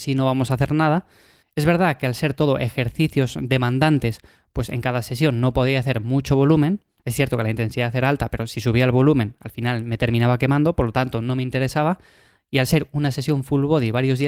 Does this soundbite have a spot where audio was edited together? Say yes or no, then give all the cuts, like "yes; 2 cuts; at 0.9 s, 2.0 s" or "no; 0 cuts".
yes; 1 cut; at 1.4 s